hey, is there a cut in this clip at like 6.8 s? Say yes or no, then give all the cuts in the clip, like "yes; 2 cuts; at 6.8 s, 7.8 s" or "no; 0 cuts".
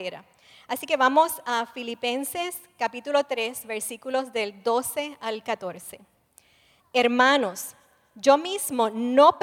yes; 1 cut; at 6.8 s